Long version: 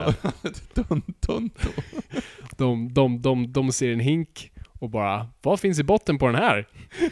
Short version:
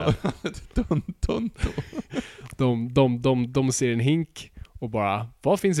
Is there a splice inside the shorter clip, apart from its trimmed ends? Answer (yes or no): no